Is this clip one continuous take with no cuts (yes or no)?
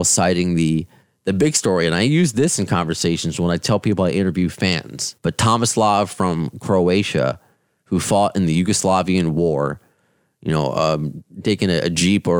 no